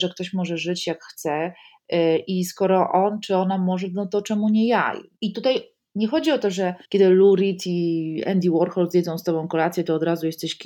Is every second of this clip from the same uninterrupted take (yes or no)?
no